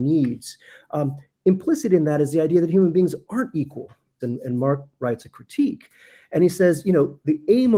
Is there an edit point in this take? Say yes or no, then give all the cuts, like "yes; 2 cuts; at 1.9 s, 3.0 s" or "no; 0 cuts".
yes; 1 cut; at 4.2 s